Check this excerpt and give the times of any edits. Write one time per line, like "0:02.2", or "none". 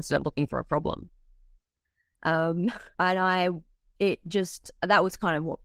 0:02.9